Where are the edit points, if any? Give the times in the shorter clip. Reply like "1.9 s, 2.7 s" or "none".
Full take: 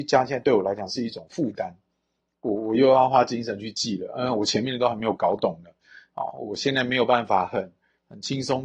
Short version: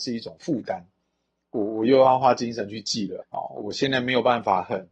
3.2 s